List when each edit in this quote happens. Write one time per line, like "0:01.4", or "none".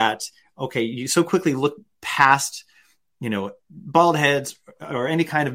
none